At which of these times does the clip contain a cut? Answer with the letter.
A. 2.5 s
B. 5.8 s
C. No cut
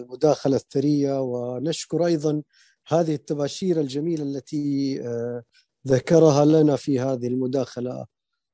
C